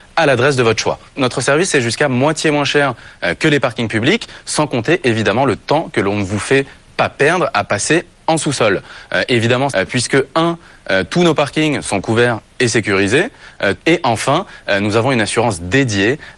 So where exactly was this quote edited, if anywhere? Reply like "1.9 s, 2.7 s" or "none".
9.7 s, 13.8 s